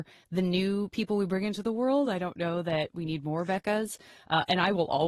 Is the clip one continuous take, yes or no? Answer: yes